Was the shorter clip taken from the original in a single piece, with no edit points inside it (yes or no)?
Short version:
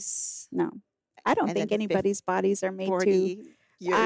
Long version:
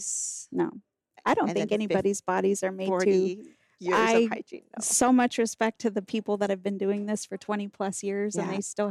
yes